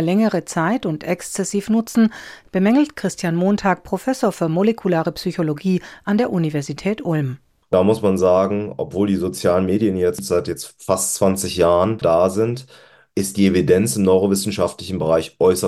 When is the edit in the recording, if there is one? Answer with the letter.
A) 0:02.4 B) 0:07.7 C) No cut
A